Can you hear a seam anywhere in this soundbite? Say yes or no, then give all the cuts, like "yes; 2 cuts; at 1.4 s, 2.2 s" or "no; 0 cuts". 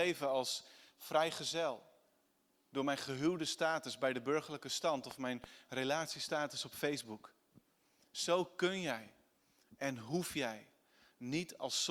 no; 0 cuts